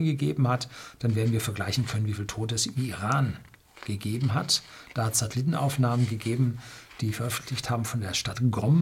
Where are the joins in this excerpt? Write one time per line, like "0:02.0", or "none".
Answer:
none